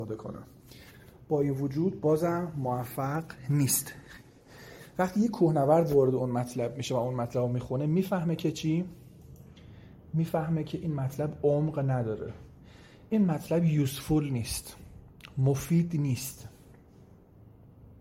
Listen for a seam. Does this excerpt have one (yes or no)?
no